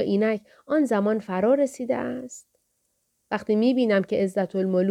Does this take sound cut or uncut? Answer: uncut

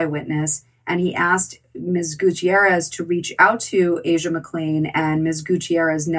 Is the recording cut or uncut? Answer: uncut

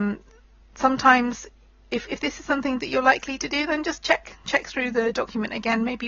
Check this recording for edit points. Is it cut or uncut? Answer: uncut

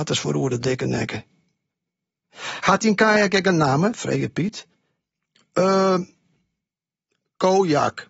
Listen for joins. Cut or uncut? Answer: uncut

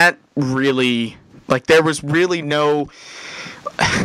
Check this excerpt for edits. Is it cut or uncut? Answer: uncut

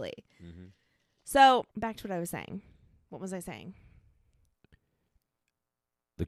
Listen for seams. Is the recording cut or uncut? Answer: cut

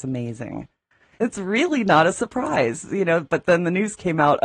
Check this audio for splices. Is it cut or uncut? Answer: cut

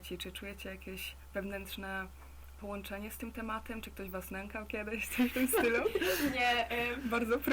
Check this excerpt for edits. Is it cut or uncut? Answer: uncut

